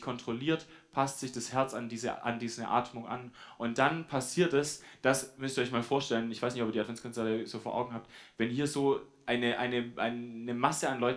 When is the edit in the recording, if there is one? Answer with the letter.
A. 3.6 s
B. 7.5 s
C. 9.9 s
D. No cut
D